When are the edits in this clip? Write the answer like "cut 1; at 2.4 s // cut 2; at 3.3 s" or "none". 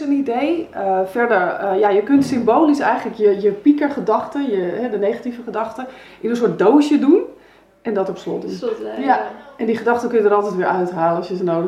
none